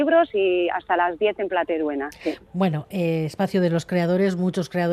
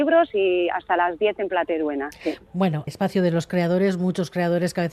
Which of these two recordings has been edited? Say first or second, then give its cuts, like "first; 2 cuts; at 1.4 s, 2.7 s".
second; 1 cut; at 2.9 s